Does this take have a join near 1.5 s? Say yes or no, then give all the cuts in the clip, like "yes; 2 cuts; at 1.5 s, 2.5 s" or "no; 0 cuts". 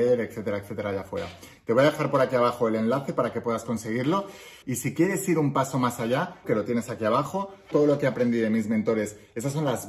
no; 3 cuts; at 4.6 s, 6.4 s, 7.7 s